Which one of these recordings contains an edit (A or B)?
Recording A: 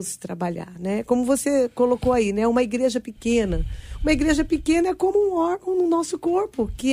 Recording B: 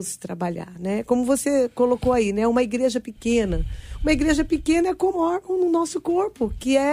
B